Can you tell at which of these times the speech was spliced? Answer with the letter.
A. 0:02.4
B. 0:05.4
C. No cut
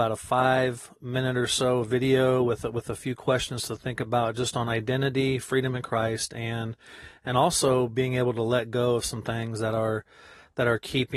C